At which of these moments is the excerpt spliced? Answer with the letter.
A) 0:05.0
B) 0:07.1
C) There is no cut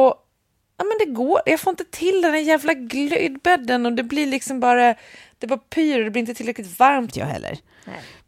B